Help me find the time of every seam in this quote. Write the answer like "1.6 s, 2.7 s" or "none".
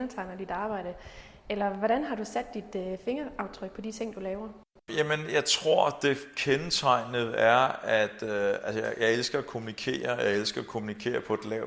none